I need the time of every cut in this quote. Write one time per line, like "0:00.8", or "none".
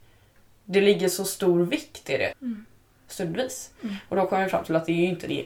0:02.3